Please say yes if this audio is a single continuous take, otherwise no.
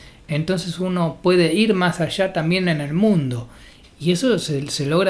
no